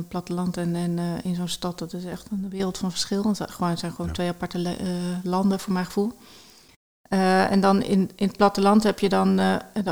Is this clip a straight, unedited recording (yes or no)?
yes